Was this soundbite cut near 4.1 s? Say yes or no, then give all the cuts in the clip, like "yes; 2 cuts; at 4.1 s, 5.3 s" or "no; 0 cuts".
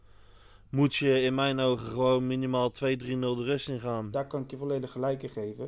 yes; 1 cut; at 4.1 s